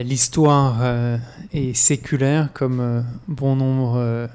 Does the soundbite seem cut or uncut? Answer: cut